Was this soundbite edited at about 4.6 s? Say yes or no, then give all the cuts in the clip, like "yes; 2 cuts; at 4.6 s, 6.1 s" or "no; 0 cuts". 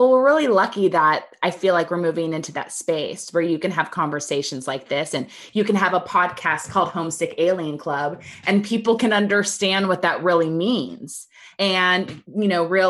no; 0 cuts